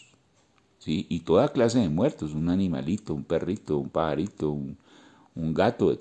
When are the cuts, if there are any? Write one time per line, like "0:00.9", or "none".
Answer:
none